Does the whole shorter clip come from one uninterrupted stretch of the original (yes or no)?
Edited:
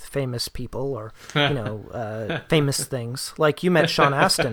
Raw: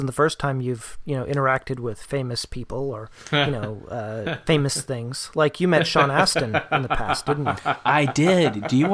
yes